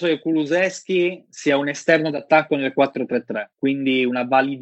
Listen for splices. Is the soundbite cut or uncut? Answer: cut